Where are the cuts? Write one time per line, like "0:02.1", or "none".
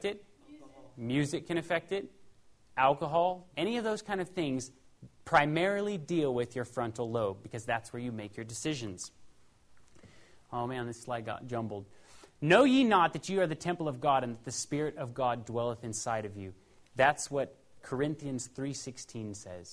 0:03.5